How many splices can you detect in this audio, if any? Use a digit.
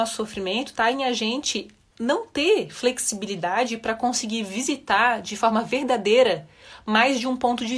1